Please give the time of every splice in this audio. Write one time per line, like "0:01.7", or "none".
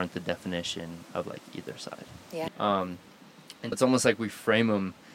0:02.5
0:03.7